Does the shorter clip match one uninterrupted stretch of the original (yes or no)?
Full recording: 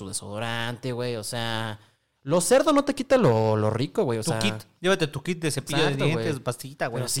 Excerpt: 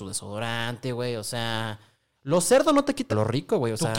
no